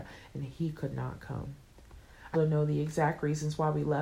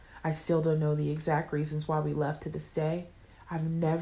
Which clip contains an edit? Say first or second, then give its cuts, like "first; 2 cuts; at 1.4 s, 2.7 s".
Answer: first; 1 cut; at 2.3 s